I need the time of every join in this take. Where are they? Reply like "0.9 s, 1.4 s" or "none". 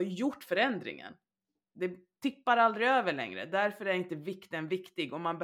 1.6 s